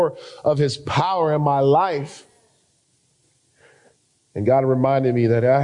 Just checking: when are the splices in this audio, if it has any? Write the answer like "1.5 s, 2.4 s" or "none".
none